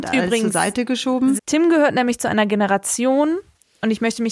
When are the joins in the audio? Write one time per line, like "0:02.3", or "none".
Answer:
0:01.4